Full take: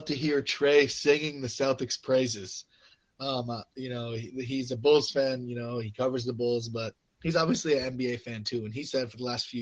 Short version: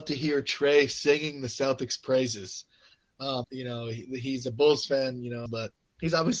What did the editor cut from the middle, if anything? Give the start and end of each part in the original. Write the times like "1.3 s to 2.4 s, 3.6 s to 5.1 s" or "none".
3.4 s to 3.7 s, 5.7 s to 6.7 s